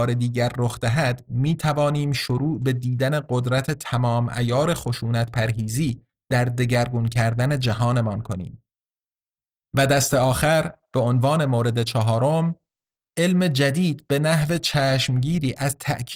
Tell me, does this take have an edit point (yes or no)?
no